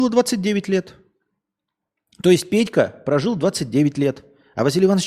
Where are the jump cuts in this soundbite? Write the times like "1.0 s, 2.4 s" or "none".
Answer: none